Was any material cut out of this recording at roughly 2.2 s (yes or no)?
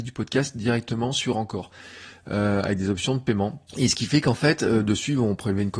no